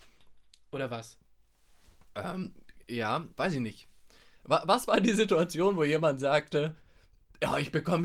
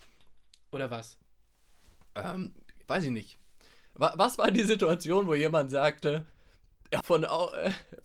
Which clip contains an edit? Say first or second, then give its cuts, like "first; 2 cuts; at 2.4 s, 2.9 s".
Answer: second; 2 cuts; at 2.8 s, 7.0 s